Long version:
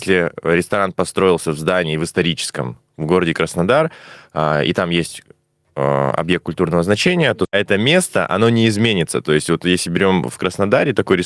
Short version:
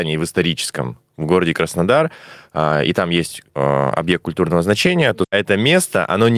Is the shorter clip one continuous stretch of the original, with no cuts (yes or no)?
no